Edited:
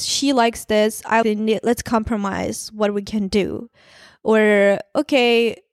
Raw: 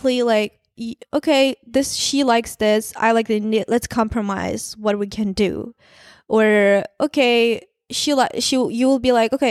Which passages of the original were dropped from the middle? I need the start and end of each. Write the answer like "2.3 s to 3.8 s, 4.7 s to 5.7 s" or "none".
3.1 s to 3.3 s